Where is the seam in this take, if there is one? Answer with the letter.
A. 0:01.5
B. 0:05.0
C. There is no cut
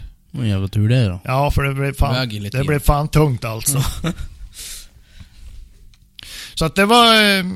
C